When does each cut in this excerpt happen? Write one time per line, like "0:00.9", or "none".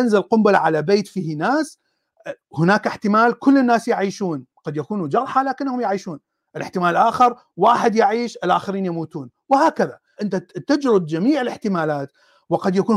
0:10.2